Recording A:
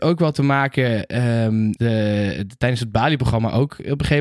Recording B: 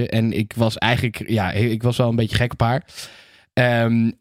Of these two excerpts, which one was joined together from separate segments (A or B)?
A